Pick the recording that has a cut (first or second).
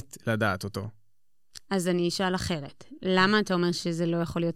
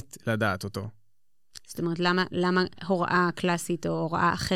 second